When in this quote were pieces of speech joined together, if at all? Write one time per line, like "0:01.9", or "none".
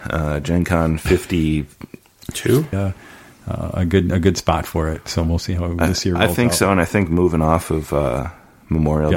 0:02.7